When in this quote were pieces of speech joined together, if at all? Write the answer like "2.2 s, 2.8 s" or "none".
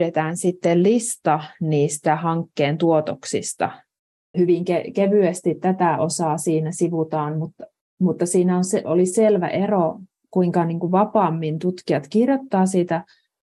4.3 s